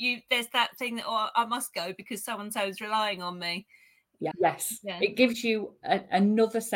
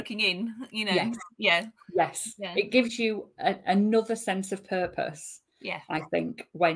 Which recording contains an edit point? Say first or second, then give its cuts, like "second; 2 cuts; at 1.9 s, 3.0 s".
first; 1 cut; at 4.3 s